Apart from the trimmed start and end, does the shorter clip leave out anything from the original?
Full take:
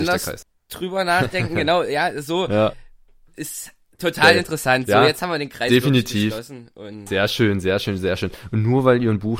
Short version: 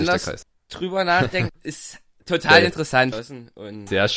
yes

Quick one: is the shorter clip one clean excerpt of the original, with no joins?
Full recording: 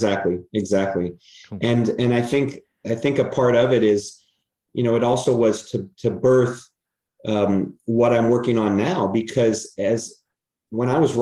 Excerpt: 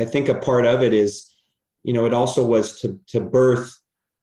yes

